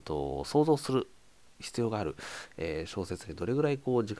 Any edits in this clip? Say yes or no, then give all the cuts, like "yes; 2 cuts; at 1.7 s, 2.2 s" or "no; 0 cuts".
no; 0 cuts